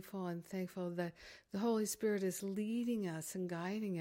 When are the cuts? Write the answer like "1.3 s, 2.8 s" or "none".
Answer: none